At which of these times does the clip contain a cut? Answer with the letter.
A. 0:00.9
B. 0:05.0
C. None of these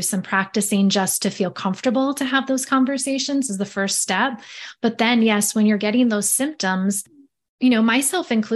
C